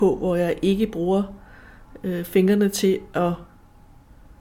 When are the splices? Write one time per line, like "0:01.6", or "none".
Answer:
none